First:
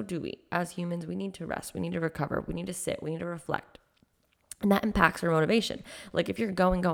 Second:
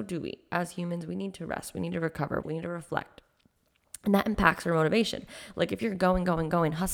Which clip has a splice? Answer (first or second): second